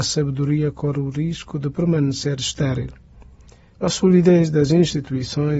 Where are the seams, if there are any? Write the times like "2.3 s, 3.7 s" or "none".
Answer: 3.8 s